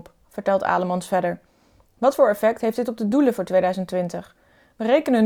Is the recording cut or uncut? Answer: uncut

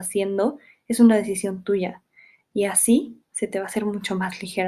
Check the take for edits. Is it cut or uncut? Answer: uncut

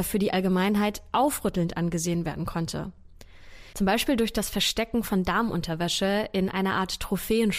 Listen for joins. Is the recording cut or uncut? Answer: cut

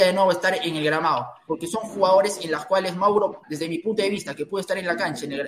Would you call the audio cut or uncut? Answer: cut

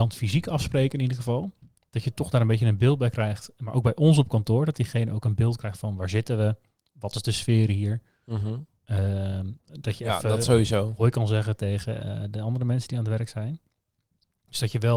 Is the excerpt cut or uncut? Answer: uncut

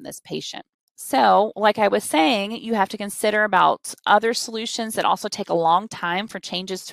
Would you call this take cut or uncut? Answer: uncut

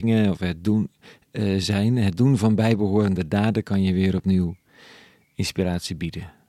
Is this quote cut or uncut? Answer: uncut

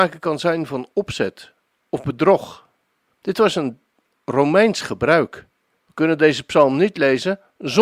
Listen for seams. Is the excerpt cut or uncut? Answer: cut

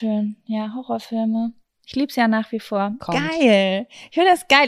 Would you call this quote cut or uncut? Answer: cut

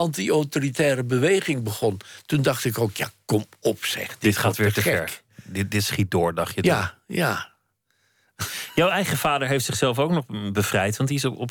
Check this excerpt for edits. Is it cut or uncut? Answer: uncut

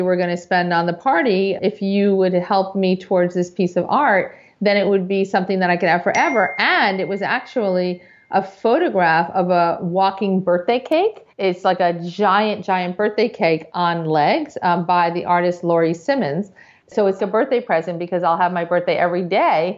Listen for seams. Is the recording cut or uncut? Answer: cut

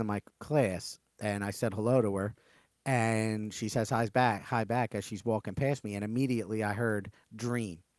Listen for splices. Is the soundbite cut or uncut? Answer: uncut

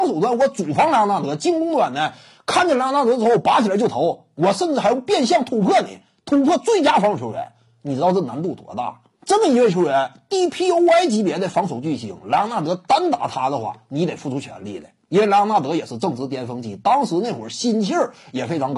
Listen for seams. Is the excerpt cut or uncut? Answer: cut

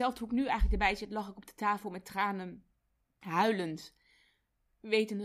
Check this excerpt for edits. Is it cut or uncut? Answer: uncut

